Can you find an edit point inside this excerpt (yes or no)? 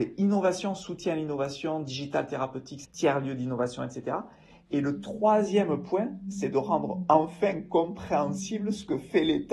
yes